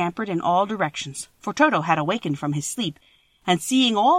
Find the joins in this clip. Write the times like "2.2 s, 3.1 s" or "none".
none

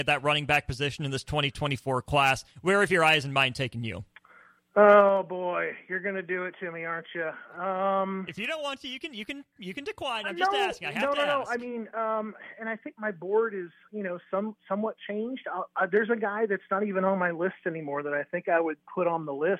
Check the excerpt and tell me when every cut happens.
none

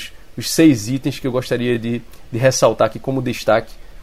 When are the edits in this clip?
none

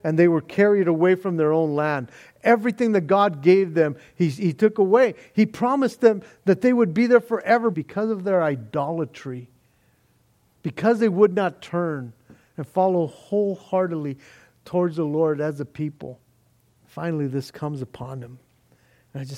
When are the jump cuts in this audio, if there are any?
7.7 s, 16.8 s

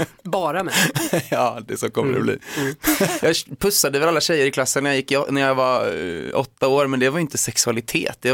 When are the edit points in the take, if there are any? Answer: 3.2 s

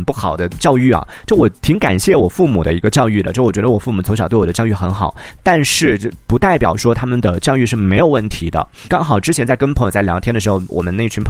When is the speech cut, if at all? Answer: none

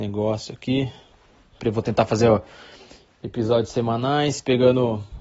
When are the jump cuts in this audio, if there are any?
1.6 s

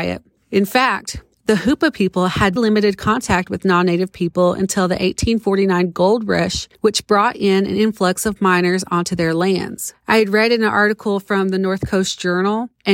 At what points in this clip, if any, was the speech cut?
2.6 s

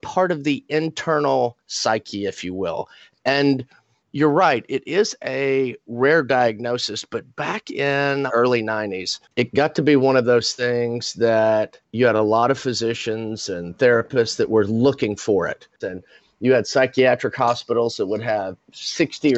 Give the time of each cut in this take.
8.3 s, 15.8 s

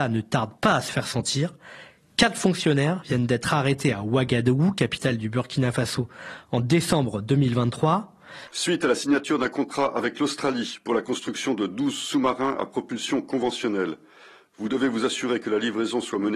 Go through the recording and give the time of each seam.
8.5 s

